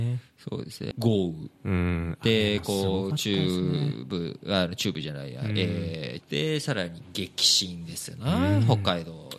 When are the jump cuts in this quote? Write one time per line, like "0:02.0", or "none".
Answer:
0:00.9
0:06.2